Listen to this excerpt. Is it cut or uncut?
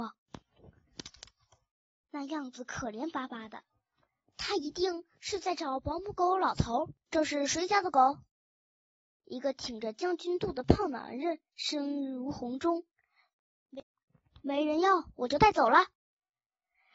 cut